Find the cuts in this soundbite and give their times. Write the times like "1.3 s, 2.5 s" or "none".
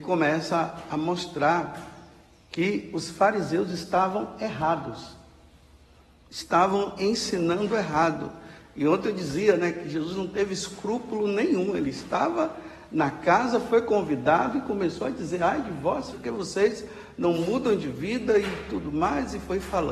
16.1 s

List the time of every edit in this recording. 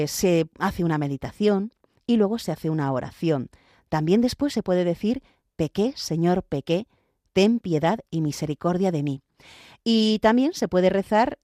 none

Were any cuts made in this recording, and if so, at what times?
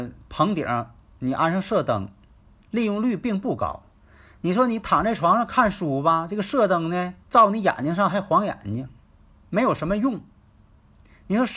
7.2 s

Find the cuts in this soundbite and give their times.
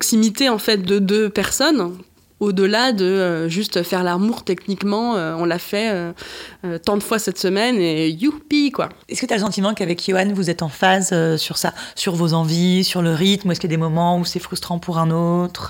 9.0 s

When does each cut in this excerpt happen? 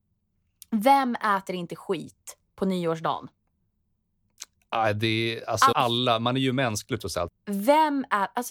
5.7 s, 7.3 s

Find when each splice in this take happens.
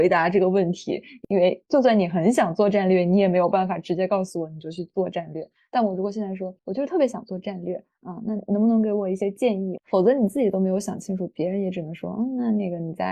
6.6 s, 9.8 s

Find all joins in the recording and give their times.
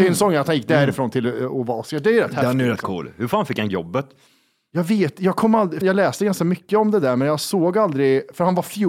5.8 s

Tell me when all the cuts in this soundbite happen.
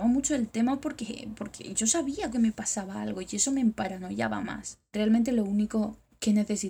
2.3 s

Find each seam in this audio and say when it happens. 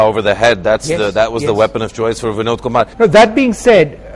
2.9 s

